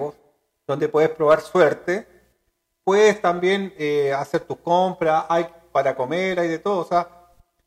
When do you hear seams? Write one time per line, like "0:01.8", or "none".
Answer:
none